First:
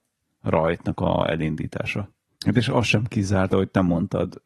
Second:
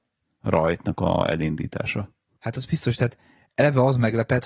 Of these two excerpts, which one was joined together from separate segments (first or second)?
first